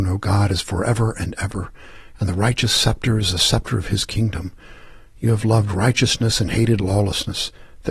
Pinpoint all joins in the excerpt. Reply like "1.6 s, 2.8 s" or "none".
none